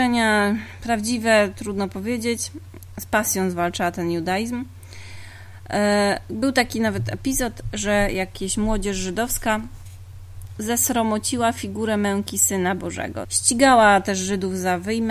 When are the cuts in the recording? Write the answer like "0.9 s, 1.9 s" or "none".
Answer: 10.6 s, 13.2 s